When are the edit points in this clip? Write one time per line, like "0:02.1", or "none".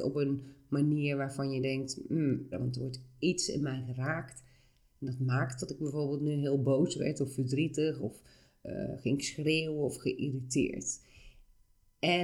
0:02.5